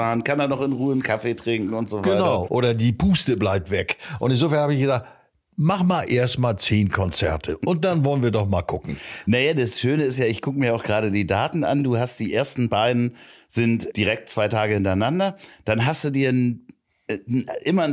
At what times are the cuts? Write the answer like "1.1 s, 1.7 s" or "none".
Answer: 2.5 s